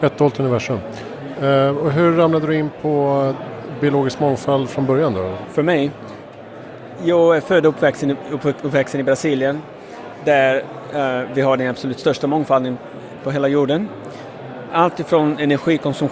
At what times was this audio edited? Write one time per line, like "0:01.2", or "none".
0:01.3
0:05.4
0:14.7